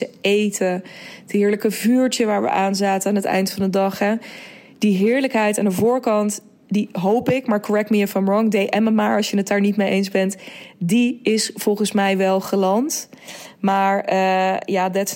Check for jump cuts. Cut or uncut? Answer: uncut